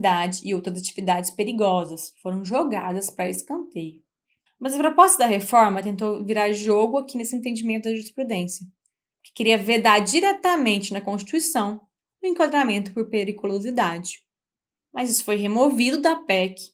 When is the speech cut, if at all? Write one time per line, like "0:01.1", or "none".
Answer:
0:04.5